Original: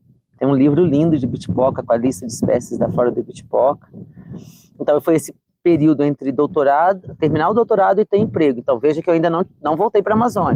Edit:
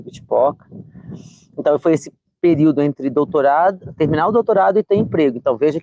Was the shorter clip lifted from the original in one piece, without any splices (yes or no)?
yes